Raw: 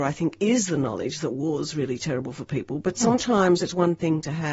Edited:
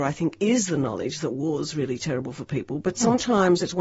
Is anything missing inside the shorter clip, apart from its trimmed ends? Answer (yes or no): no